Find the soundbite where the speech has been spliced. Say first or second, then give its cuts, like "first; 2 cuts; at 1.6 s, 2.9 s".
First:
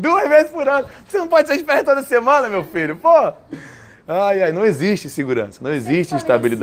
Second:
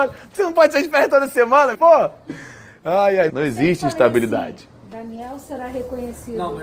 second; 2 cuts; at 1.7 s, 3.3 s